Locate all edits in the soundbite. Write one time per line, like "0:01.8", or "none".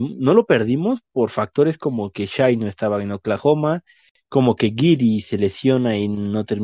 none

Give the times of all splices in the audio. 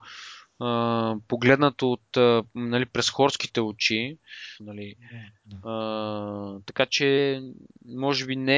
0:04.6

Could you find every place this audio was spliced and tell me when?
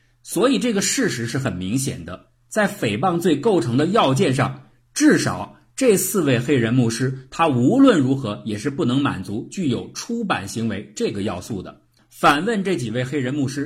0:12.0

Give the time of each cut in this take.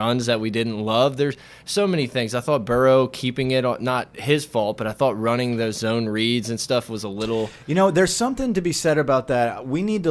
none

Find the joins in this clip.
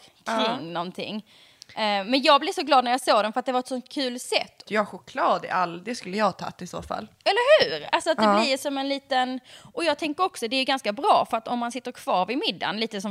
0:04.7

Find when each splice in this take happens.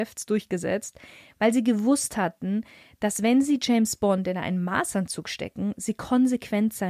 none

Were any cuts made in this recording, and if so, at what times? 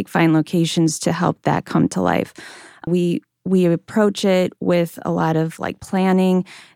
0:02.9

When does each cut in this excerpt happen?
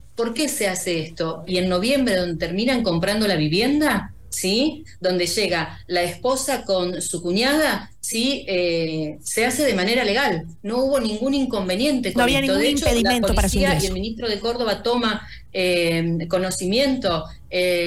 0:01.5

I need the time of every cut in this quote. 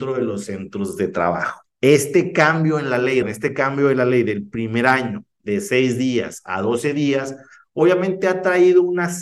0:01.7
0:03.2

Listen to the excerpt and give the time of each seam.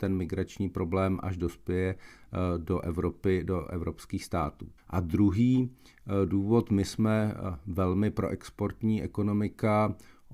0:04.8

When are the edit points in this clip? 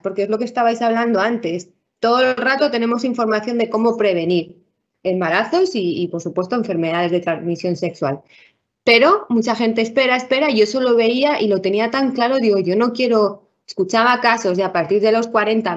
none

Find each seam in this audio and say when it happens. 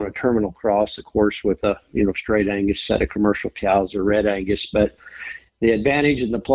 none

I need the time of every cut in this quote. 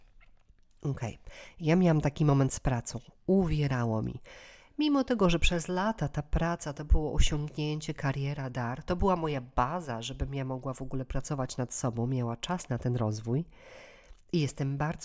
none

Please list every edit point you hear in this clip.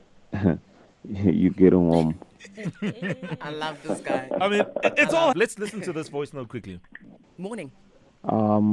0:05.3
0:07.2

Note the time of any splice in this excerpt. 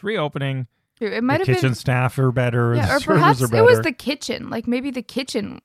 0:01.0

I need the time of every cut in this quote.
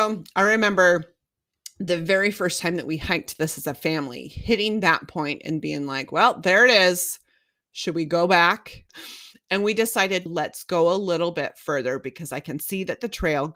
0:08.9
0:10.3

